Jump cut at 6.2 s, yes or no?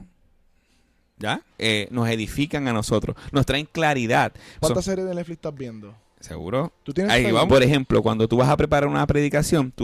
no